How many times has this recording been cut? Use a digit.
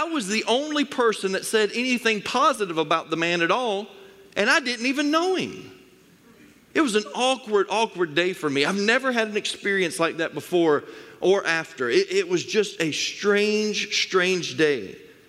0